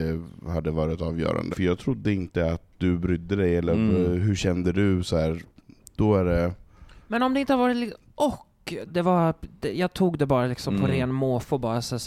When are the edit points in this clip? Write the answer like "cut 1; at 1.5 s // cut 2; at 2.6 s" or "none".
cut 1; at 1.5 s // cut 2; at 8.9 s